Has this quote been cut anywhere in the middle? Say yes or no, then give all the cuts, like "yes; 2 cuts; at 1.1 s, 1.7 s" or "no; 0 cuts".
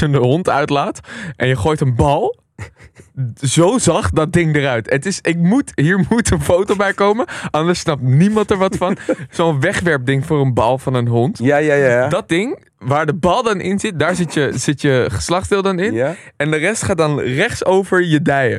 no; 0 cuts